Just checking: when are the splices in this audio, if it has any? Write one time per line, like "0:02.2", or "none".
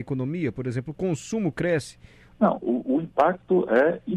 0:02.3